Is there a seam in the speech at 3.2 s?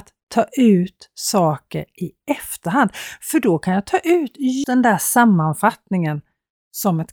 no; 1 cut; at 4.6 s

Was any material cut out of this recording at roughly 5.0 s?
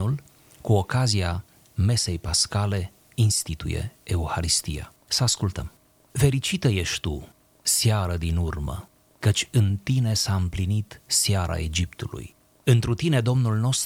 yes; 1 cut; at 5.0 s

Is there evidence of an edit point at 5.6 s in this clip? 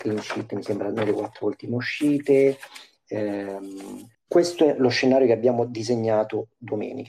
no; 1 cut; at 4.1 s

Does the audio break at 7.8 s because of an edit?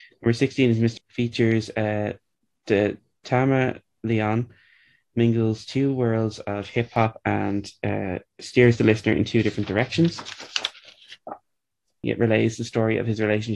no; 2 cuts; at 1.0 s, 12.0 s

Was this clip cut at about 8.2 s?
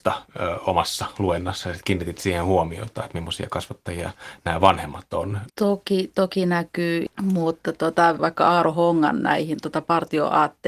yes; 2 cuts; at 5.5 s, 8.2 s

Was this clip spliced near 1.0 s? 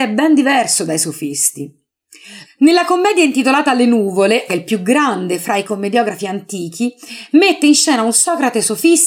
no; 2 cuts; at 2.4 s, 4.5 s

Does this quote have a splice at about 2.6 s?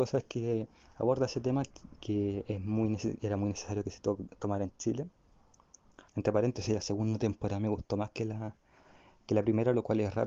no; 1 cut; at 6.1 s

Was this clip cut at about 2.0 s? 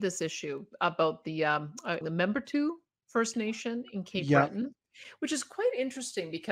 yes; 1 cut; at 2.0 s

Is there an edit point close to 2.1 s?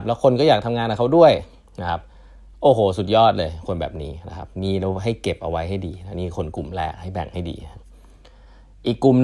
no; 0 cuts

